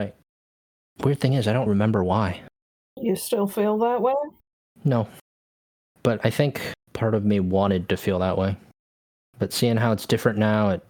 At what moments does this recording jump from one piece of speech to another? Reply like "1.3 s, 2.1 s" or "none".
1.7 s, 9.3 s